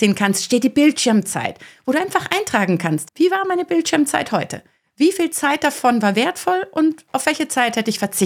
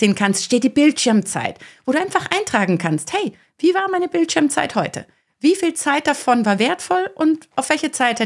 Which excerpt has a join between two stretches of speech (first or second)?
first